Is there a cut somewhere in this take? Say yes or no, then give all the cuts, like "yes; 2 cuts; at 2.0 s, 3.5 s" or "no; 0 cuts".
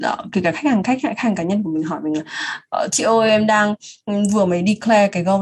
no; 0 cuts